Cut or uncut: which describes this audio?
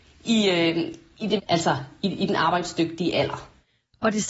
cut